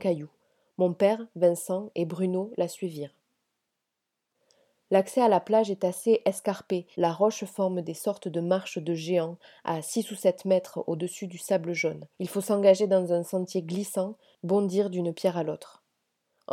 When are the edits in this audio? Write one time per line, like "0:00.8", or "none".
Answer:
0:06.9
0:12.1
0:14.4